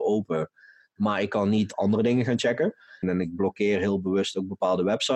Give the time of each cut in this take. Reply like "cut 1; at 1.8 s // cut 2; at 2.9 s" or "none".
cut 1; at 3.0 s